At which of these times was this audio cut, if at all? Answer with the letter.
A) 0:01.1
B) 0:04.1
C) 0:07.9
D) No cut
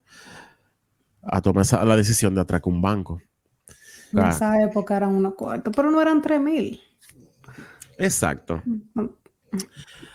B